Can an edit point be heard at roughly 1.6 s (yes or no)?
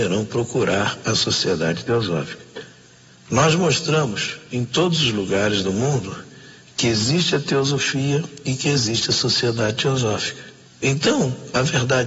no